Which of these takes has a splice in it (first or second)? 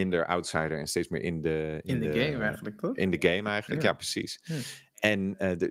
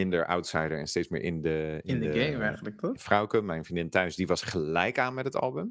second